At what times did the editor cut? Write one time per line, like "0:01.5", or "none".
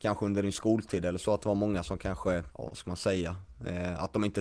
0:02.5